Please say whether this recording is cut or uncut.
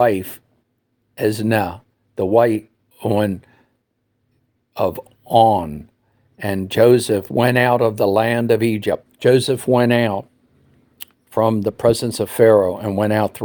cut